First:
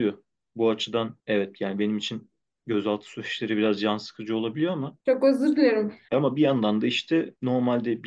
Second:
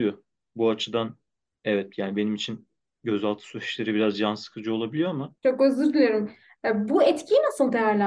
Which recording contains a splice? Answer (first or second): first